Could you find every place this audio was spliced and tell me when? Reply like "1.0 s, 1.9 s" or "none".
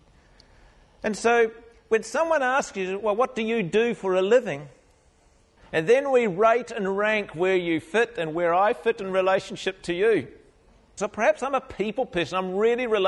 5.6 s, 11.0 s